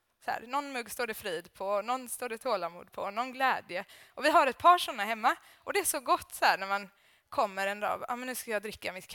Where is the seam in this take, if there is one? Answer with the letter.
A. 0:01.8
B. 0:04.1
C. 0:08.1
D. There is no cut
D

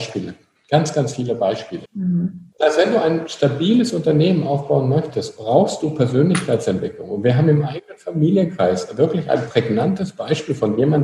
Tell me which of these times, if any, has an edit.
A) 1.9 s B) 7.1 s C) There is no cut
A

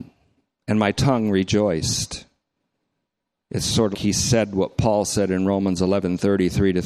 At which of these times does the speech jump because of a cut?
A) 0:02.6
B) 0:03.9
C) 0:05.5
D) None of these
B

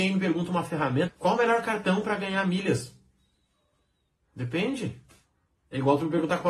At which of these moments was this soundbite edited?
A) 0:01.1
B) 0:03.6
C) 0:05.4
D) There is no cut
A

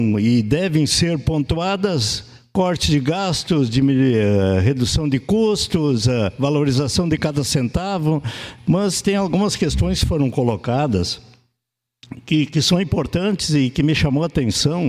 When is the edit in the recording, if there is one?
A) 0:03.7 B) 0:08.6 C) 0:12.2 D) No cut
B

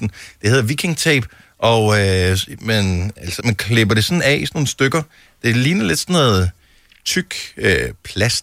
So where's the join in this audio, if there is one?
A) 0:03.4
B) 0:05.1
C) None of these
A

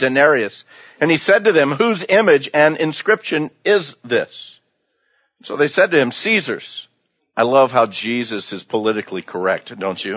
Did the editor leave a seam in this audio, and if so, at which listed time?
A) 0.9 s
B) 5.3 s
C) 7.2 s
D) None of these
C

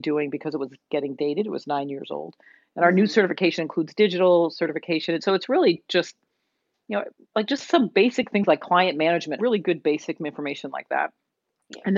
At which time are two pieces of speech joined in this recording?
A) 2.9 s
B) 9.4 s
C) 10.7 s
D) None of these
B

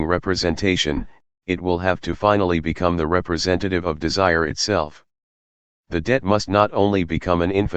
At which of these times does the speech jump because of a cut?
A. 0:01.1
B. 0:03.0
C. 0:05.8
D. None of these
C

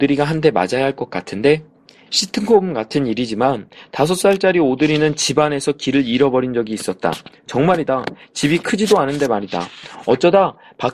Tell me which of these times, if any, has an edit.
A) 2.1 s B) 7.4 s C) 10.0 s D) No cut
A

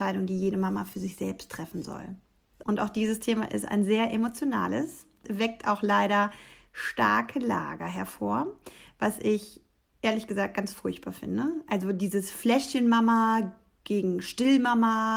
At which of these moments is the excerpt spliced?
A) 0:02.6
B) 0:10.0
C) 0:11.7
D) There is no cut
A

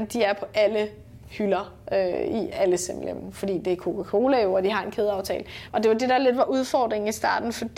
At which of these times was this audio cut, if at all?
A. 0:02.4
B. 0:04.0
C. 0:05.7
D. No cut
C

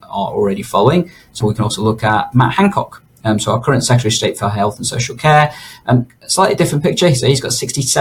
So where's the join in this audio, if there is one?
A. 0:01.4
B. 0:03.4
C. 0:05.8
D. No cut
A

